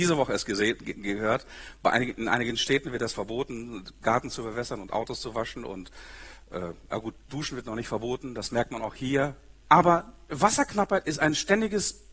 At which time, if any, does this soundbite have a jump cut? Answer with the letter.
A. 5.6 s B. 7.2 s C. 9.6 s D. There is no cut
C